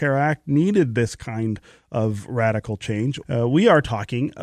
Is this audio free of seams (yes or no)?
no